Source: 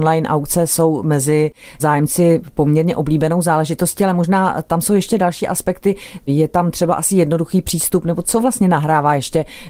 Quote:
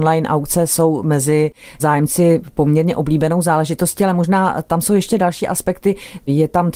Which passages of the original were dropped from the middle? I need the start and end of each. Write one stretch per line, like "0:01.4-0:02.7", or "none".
none